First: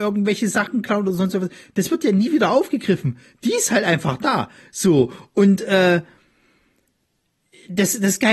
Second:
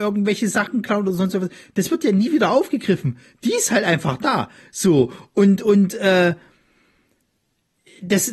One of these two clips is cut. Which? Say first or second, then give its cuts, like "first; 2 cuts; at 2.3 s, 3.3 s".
first; 1 cut; at 5.6 s